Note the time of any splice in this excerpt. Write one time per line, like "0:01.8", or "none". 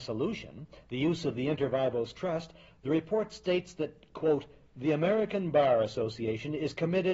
none